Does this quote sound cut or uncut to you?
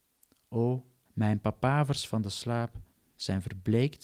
cut